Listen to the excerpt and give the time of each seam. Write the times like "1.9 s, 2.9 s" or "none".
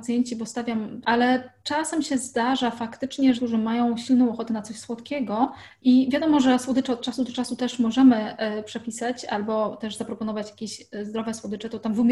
1.0 s, 3.4 s